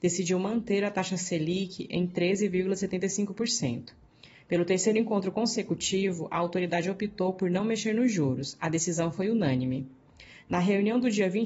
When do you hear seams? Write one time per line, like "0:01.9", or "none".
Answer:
none